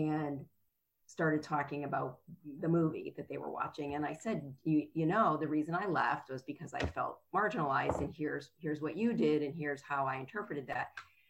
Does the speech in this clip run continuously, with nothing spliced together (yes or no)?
yes